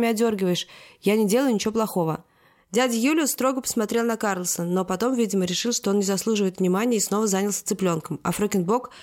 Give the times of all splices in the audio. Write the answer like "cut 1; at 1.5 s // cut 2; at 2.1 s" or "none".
none